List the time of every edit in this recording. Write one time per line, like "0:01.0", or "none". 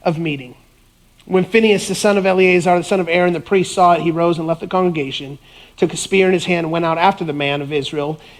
none